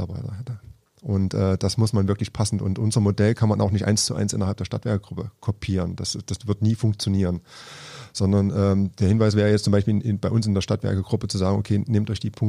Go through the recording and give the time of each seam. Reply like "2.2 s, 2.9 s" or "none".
none